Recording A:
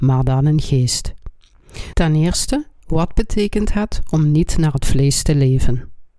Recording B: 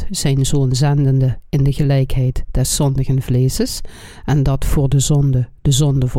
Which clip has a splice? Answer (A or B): A